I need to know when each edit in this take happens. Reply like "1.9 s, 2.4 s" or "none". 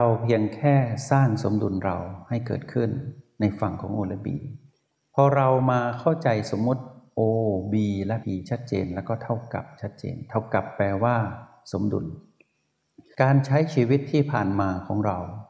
8.2 s